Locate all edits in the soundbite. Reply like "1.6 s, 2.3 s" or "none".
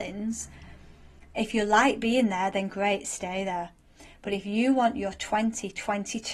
none